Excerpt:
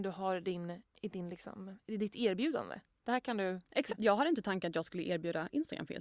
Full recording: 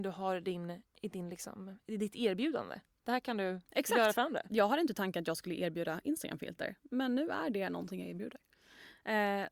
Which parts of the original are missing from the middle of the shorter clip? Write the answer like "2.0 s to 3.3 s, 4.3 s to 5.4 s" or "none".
3.9 s to 4.4 s